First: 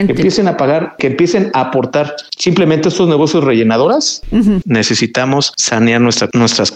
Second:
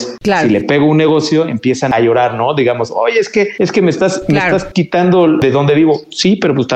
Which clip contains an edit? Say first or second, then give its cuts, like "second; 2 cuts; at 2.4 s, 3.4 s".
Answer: first; 1 cut; at 4.6 s